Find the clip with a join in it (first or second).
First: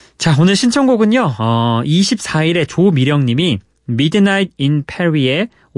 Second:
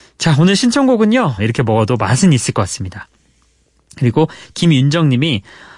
second